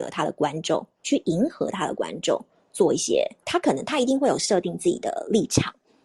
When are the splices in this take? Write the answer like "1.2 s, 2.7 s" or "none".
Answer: 3.4 s